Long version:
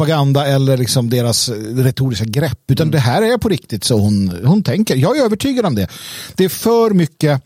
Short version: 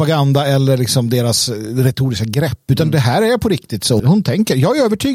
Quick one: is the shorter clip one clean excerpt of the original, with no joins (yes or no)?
no